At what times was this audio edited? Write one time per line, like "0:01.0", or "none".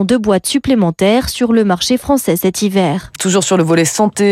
0:03.2